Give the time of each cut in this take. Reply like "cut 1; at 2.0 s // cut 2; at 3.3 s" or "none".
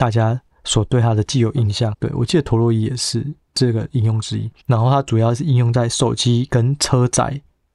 cut 1; at 1.9 s // cut 2; at 4.6 s